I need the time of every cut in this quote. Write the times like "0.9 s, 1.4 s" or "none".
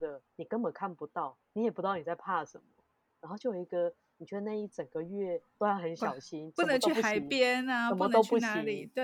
6.5 s